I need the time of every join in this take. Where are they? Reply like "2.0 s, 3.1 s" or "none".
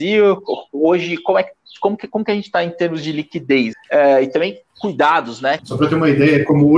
3.7 s, 5.6 s